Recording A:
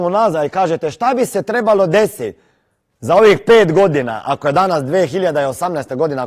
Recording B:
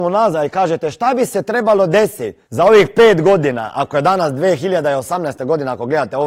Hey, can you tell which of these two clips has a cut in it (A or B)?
B